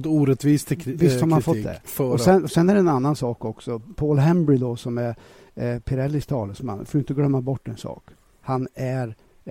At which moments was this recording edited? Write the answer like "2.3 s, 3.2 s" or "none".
none